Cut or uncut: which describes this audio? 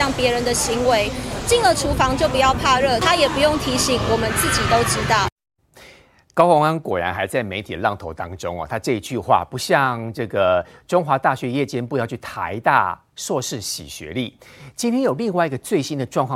uncut